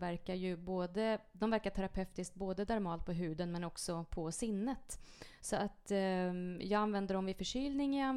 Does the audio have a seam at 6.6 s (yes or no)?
no